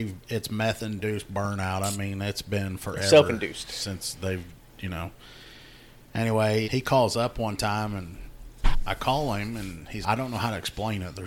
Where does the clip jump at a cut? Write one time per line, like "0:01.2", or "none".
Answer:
0:06.6
0:10.0